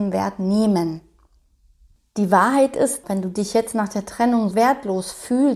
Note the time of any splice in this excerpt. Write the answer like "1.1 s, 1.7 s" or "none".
3.0 s, 4.5 s